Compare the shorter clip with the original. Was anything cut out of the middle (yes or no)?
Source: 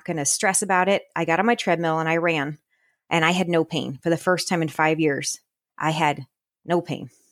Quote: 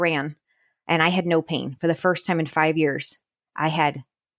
no